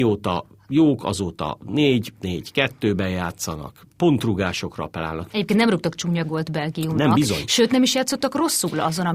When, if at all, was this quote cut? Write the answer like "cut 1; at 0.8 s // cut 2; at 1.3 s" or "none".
cut 1; at 5.3 s